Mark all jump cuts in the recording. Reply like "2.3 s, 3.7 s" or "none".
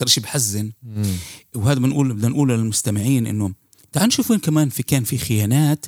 none